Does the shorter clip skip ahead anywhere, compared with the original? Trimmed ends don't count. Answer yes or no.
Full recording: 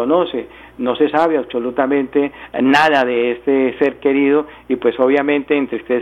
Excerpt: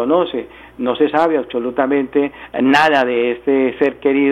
no